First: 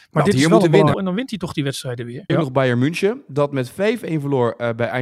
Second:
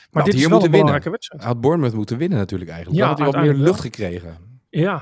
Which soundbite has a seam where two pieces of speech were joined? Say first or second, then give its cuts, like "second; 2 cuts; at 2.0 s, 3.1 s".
first; 2 cuts; at 0.9 s, 2.3 s